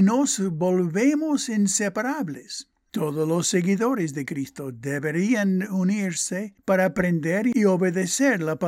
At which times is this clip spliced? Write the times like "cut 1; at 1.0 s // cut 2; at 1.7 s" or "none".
cut 1; at 2.9 s

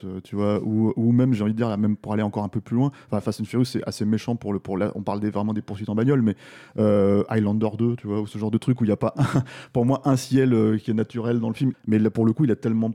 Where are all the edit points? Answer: cut 1; at 11.7 s

